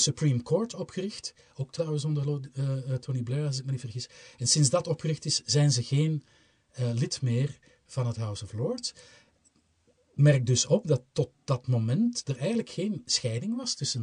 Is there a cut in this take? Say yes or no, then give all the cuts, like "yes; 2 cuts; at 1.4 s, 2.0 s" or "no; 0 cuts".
no; 0 cuts